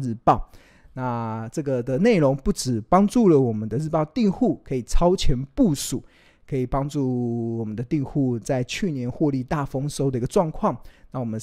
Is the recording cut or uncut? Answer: uncut